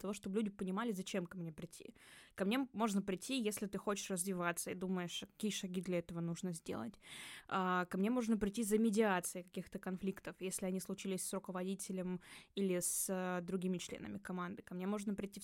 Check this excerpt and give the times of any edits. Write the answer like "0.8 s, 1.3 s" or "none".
none